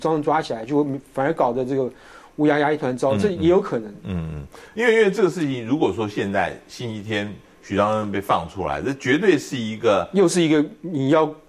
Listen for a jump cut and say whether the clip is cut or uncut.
uncut